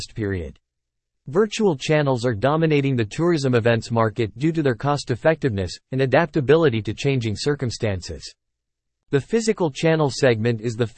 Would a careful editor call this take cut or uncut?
cut